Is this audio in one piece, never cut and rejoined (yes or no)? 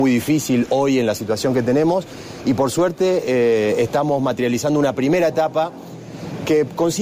yes